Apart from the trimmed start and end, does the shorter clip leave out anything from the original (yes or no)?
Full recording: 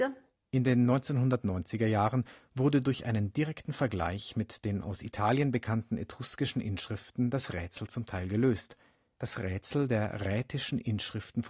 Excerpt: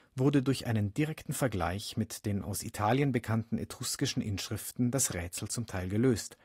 no